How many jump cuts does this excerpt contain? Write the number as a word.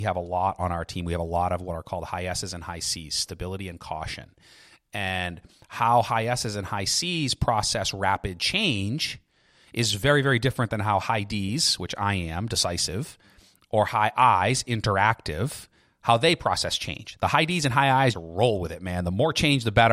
one